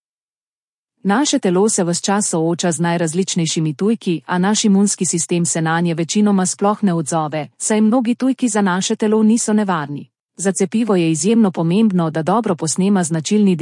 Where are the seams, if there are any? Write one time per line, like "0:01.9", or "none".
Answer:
0:10.3